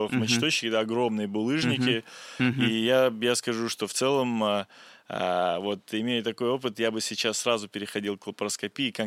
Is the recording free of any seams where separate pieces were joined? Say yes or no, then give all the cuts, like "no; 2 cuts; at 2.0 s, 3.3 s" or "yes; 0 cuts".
yes; 0 cuts